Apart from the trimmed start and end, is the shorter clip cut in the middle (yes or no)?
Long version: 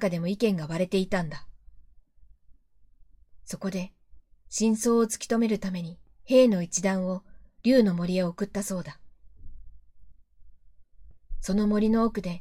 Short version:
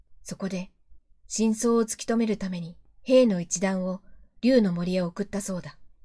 no